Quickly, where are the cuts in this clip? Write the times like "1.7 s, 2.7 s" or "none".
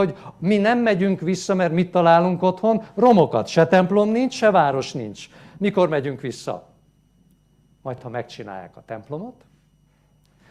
none